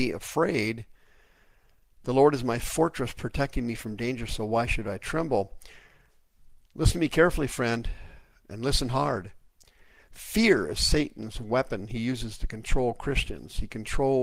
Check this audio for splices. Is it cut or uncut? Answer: uncut